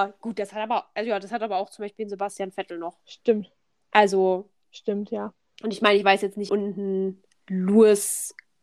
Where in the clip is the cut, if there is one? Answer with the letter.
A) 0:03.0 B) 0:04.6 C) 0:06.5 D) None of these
C